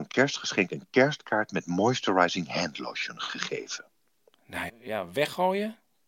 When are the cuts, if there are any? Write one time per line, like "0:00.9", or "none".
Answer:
0:04.7